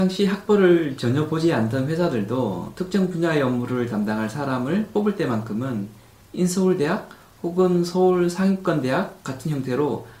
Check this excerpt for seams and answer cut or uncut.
uncut